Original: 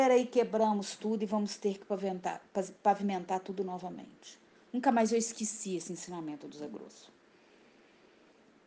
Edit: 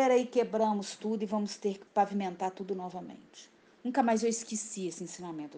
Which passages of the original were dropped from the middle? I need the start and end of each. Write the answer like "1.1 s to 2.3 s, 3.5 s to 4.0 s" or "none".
1.9 s to 2.8 s